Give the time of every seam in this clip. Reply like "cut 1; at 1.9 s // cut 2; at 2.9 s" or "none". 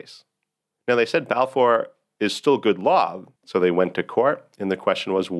cut 1; at 3.4 s

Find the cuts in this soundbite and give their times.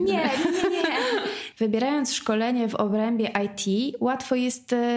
cut 1; at 1.5 s

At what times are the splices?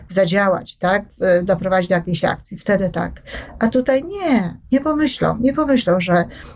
none

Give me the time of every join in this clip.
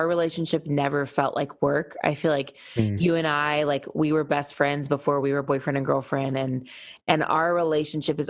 none

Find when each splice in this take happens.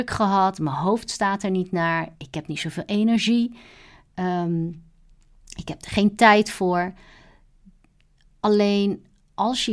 none

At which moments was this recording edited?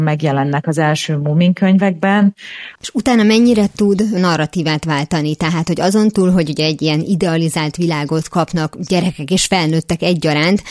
cut 1; at 2.8 s

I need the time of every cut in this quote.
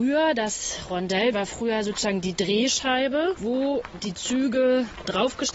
cut 1; at 1.3 s

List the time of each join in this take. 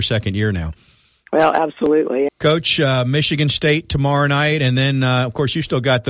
cut 1; at 2.3 s

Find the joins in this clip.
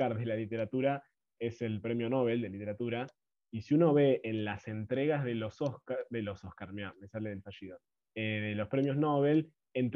none

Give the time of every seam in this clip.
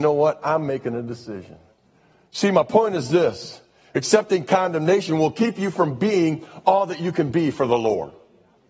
none

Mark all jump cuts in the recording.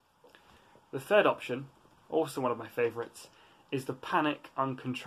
none

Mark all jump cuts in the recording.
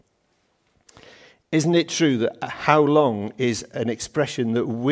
none

